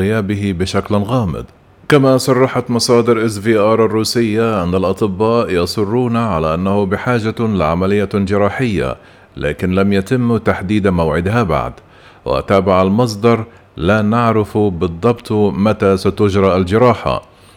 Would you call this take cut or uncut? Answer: uncut